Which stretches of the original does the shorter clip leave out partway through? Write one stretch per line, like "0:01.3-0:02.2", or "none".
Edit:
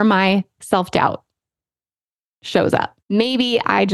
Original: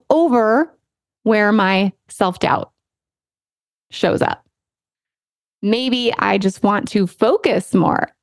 0:04.5-0:05.5